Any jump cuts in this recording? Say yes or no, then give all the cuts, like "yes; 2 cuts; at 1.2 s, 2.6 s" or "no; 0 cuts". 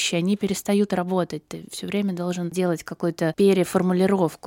no; 0 cuts